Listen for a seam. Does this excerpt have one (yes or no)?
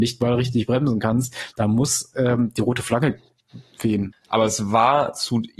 yes